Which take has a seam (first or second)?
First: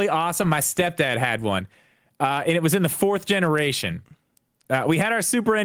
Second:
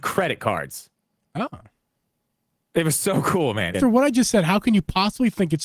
second